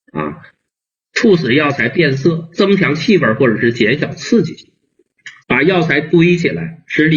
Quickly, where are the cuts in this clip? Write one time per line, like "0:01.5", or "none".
0:05.4